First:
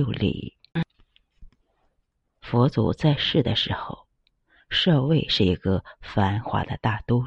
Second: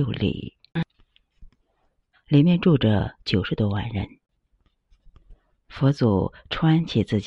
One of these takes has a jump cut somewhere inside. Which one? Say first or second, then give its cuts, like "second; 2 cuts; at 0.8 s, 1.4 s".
second; 2 cuts; at 2.1 s, 5.6 s